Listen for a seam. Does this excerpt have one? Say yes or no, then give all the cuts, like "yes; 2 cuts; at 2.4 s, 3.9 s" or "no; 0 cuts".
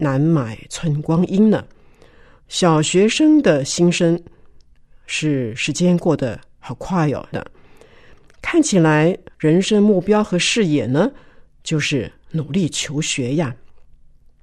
yes; 2 cuts; at 7.3 s, 9.3 s